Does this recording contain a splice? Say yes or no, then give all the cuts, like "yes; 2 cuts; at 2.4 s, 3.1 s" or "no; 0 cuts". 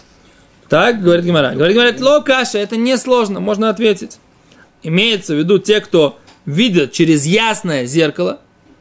yes; 1 cut; at 4.6 s